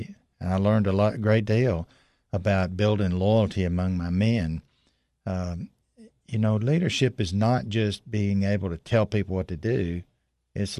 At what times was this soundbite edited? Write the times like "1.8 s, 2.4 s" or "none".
none